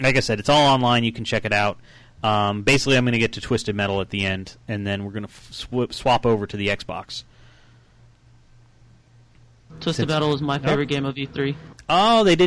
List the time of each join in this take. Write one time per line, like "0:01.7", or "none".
none